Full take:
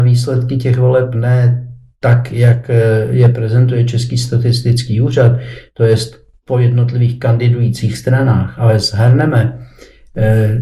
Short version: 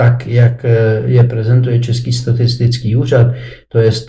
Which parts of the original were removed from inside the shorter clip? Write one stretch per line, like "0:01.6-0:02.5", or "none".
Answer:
none

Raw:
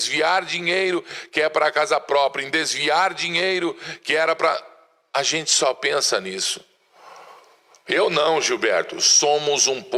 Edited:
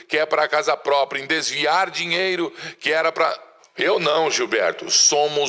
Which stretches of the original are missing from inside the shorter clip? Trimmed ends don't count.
0:04.8-0:07.7

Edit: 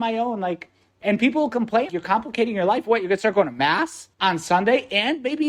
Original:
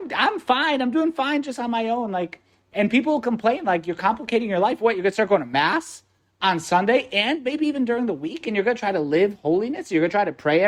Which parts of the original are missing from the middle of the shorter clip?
0:03.6-0:03.8
0:06.1-0:06.3

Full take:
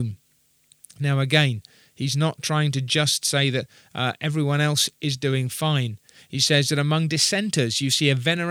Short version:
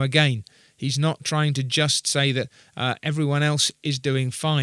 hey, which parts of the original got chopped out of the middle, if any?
none

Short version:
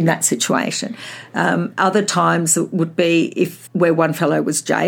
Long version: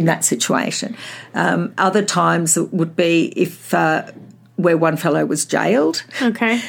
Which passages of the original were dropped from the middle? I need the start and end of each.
0:03.7-0:04.5

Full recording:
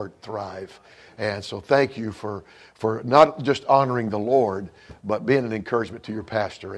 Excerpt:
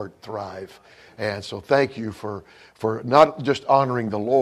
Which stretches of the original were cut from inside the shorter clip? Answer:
none

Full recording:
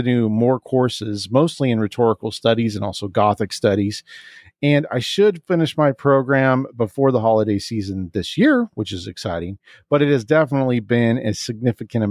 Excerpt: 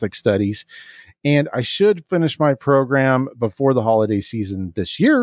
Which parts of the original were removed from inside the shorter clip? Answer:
none

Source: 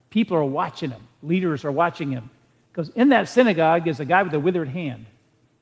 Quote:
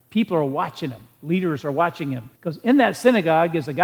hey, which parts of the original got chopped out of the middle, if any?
0:02.3-0:02.7

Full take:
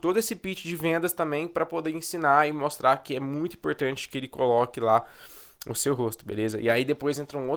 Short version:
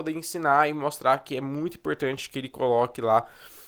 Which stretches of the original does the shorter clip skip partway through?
none

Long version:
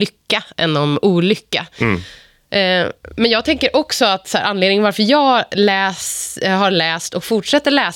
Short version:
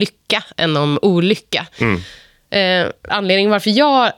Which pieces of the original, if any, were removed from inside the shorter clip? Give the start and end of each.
0:03.1-0:04.4

